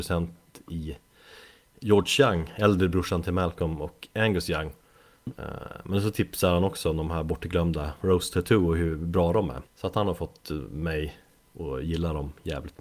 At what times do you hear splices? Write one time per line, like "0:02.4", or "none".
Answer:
0:05.3
0:09.7